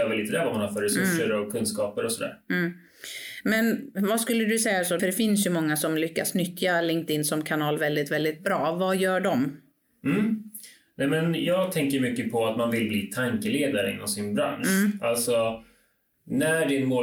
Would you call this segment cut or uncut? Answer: cut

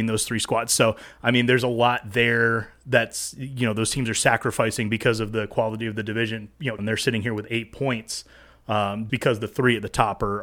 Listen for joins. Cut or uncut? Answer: cut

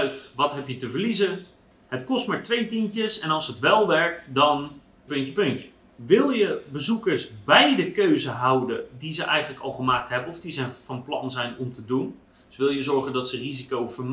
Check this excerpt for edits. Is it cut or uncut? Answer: cut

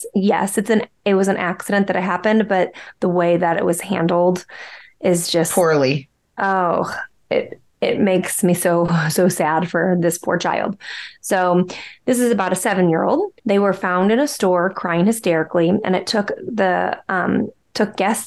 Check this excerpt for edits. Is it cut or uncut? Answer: cut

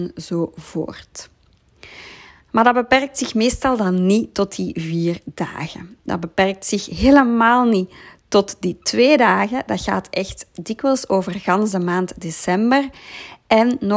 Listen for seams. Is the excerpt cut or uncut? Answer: uncut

